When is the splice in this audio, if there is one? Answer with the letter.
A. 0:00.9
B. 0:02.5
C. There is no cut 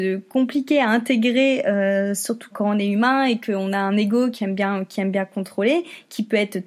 B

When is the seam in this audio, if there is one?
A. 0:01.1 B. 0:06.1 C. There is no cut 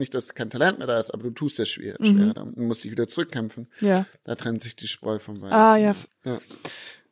B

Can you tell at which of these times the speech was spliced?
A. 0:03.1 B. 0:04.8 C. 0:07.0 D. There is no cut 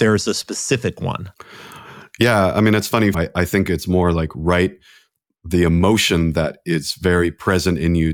A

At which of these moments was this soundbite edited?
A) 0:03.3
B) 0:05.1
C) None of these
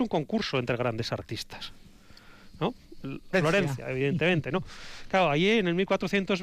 A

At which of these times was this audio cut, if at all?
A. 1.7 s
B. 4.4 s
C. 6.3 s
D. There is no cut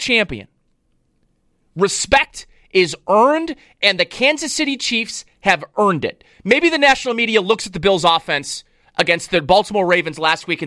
C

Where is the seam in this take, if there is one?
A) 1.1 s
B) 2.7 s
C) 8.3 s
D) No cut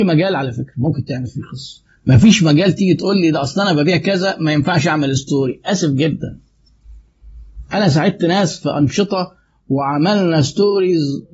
D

